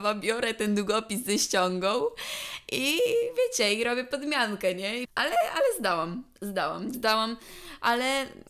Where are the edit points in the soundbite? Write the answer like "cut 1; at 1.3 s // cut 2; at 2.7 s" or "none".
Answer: cut 1; at 5.0 s // cut 2; at 6.9 s